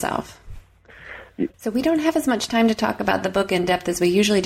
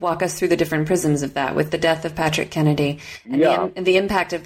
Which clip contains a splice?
first; 1 cut; at 1.5 s

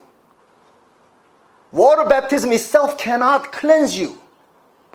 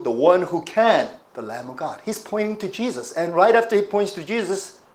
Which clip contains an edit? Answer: second; 1 cut; at 1.3 s

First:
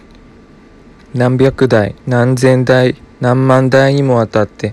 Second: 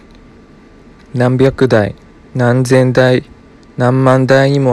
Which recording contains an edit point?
first; 2 cuts; at 2.0 s, 3.1 s

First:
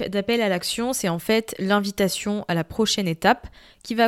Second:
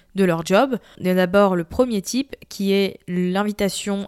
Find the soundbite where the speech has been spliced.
second; 1 cut; at 1.0 s

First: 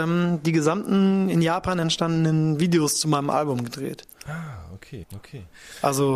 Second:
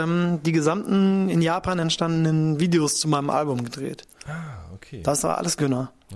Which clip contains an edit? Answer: first; 1 cut; at 5.0 s

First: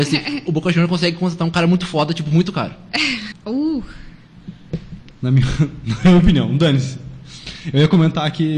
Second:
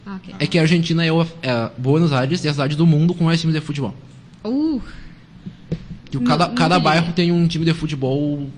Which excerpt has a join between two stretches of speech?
first; 2 cuts; at 3.3 s, 5.1 s

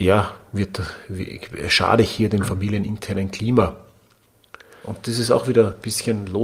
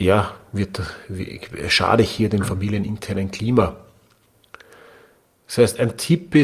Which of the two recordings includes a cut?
first; 1 cut; at 4.8 s

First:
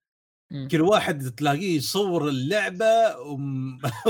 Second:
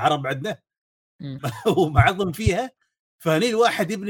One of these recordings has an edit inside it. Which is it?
second; 1 cut; at 1.4 s

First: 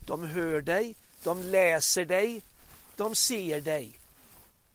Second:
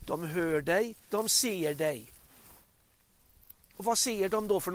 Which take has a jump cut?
second; 1 cut; at 1.1 s

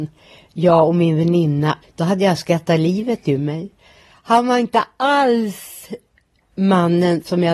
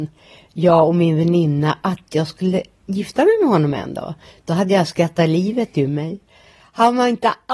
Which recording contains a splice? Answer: first; 1 cut; at 1.8 s

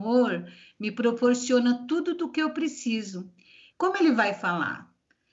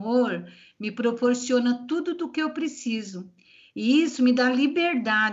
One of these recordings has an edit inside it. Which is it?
first; 1 cut; at 3.7 s

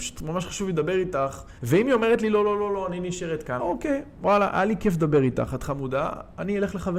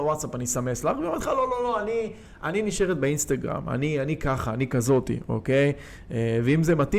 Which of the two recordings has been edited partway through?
first; 2 cuts; at 1.6 s, 3.6 s

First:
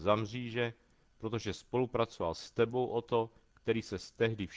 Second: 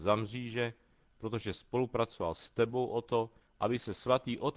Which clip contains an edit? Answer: second; 1 cut; at 3.4 s

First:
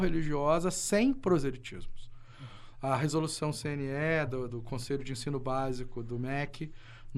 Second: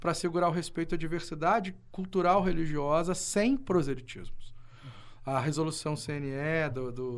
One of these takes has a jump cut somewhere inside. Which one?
first; 1 cut; at 4.5 s

